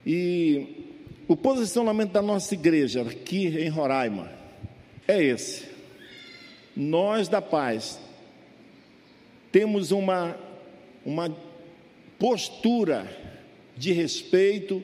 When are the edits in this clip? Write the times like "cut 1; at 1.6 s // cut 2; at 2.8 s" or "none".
cut 1; at 5.0 s